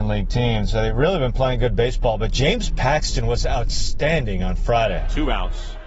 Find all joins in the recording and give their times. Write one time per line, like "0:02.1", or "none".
none